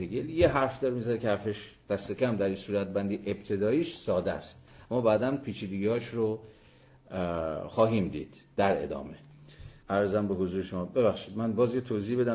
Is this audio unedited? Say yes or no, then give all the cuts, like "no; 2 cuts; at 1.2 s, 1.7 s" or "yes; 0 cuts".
no; 1 cut; at 9.8 s